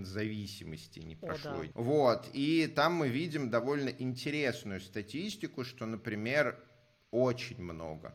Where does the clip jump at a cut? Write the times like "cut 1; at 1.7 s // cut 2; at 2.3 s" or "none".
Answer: cut 1; at 1.7 s